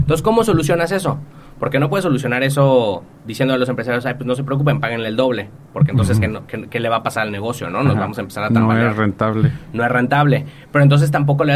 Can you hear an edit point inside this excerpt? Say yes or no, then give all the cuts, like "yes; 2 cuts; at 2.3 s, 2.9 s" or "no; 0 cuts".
no; 0 cuts